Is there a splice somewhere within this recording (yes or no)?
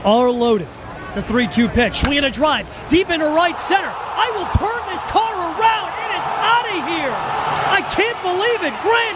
yes